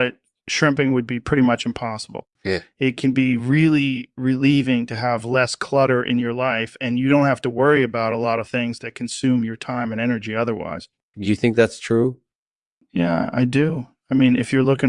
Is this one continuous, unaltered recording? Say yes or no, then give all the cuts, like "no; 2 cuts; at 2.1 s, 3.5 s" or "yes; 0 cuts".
no; 2 cuts; at 2.4 s, 11.1 s